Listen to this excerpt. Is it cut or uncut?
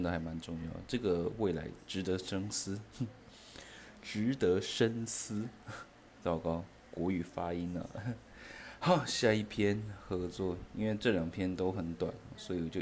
uncut